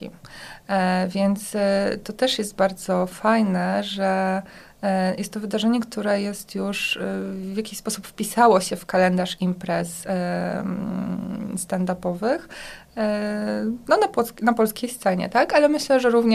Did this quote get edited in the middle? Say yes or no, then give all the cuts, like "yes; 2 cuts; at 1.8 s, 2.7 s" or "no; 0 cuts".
no; 0 cuts